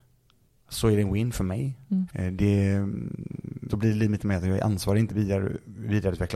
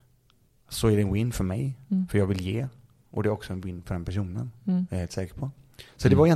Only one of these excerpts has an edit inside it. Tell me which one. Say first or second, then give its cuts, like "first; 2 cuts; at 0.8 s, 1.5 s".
first; 3 cuts; at 2.1 s, 3.7 s, 5.1 s